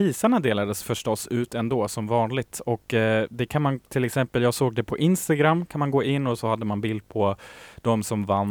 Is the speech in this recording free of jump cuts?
yes; 0 cuts

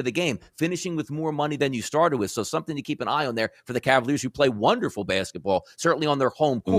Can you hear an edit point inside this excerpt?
no; 0 cuts

